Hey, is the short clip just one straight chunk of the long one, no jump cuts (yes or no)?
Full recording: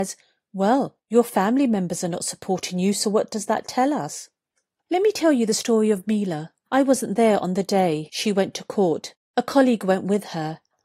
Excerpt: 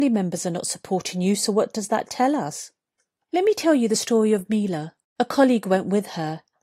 no